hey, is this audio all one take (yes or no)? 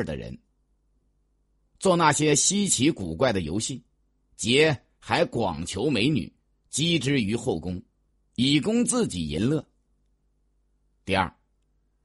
yes